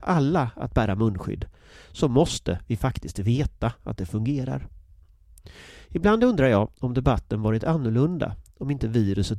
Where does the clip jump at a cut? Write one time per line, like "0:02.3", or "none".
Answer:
none